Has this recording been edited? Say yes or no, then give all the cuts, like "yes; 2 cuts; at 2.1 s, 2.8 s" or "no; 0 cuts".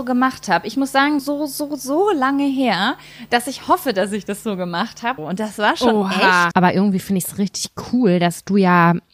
yes; 3 cuts; at 1.2 s, 5.2 s, 6.5 s